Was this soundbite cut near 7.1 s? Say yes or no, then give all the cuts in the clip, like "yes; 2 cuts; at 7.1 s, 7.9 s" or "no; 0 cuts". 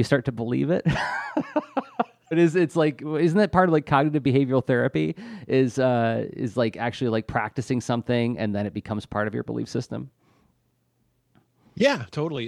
no; 1 cut; at 2.3 s